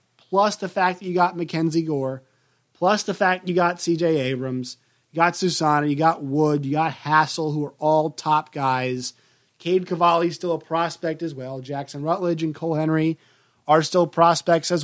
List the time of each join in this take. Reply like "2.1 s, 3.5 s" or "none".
none